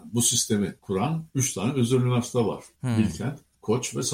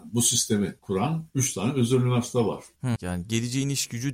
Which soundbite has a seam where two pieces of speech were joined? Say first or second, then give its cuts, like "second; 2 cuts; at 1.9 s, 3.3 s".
second; 1 cut; at 3.0 s